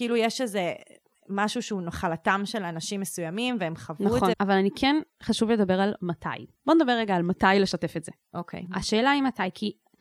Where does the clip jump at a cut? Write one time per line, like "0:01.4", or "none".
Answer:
0:04.3
0:06.5
0:08.7